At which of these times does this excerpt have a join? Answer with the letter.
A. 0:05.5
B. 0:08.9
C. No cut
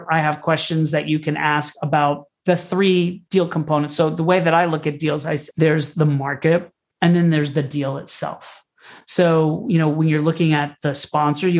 A